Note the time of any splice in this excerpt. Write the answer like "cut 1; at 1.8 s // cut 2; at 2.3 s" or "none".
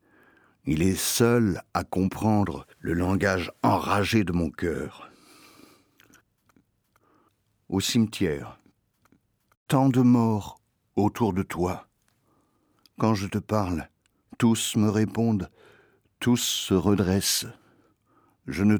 cut 1; at 2.7 s